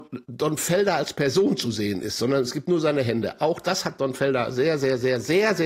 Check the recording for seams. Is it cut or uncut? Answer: uncut